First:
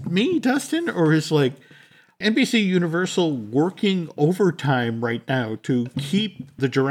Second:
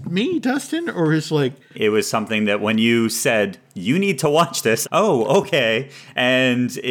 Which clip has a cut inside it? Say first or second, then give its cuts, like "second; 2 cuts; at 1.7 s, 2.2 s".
second; 2 cuts; at 1.7 s, 4.8 s